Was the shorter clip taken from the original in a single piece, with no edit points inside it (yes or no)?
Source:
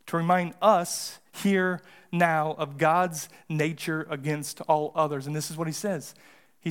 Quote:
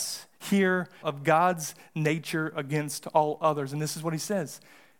no